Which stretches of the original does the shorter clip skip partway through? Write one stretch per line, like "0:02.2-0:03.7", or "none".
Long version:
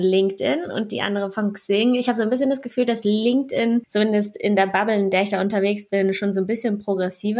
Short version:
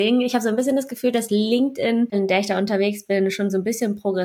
0:03.9-0:04.9

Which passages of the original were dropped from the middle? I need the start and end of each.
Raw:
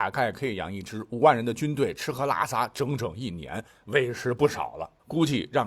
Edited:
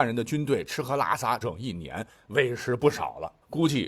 0:02.7-0:03.0

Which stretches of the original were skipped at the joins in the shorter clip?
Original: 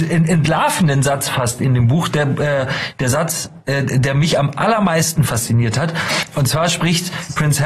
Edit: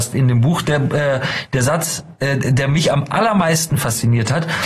none

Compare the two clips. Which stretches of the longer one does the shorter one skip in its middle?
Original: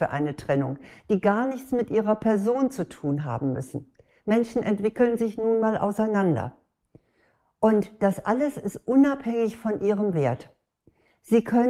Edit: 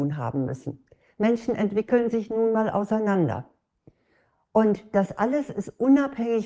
none

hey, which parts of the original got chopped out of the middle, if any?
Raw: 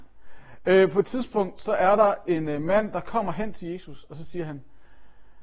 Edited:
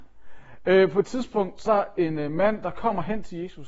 0:01.7-0:02.0

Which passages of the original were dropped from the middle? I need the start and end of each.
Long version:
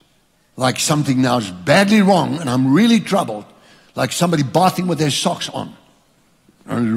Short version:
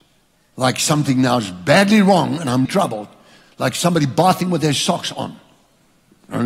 0:02.7-0:03.0

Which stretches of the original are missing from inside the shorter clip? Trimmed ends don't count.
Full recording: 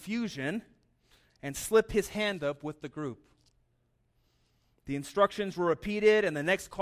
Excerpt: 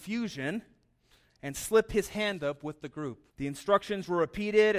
0:03.3-0:04.8

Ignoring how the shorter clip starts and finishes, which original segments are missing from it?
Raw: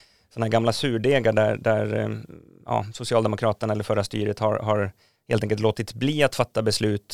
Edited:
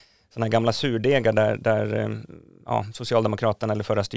none

